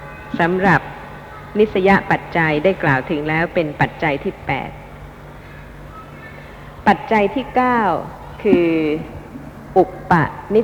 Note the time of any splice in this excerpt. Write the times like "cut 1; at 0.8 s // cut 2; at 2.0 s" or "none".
none